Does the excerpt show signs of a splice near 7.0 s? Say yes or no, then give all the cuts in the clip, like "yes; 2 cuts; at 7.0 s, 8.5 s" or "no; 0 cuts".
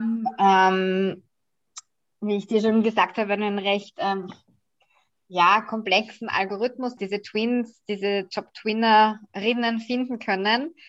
yes; 1 cut; at 7.0 s